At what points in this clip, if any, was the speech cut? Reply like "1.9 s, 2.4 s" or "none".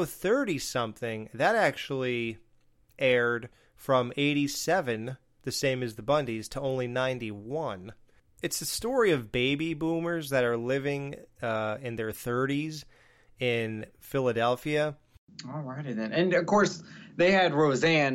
none